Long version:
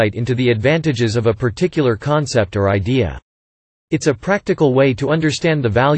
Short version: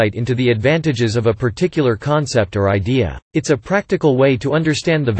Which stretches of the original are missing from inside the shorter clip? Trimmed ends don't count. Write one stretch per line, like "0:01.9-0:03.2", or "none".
0:03.2-0:03.8